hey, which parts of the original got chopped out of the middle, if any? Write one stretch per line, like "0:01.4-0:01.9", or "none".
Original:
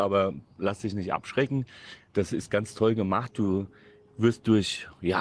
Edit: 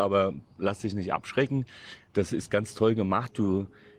none